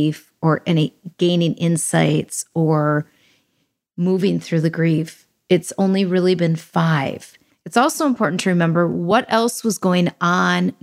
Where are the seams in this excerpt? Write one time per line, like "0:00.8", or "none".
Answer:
0:07.5